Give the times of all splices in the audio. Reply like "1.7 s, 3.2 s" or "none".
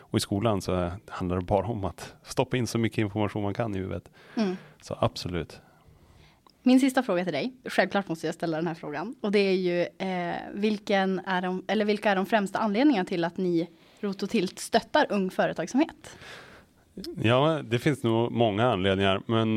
7.6 s